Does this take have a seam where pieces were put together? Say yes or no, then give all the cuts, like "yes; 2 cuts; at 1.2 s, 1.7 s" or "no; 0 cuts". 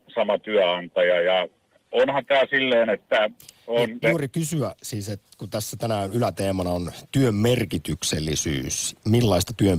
yes; 1 cut; at 4.0 s